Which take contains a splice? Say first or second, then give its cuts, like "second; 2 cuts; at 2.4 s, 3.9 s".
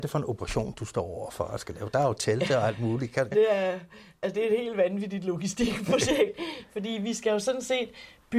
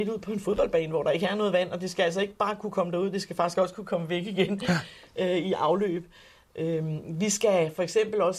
first; 1 cut; at 3.3 s